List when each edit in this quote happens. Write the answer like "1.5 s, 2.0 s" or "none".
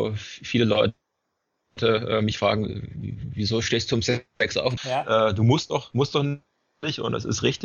4.8 s